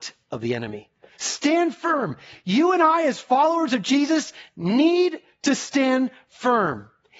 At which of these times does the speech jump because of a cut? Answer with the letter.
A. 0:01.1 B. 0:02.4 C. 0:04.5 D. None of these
A